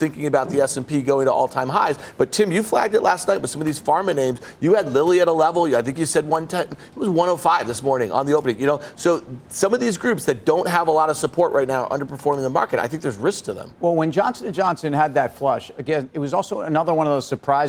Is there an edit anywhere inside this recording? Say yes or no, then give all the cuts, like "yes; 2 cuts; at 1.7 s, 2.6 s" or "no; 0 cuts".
no; 0 cuts